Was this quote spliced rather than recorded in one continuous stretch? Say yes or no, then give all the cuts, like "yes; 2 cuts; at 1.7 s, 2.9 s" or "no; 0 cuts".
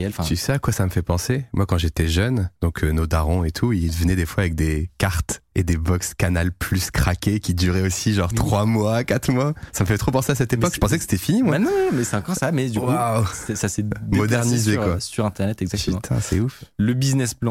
yes; 1 cut; at 2.6 s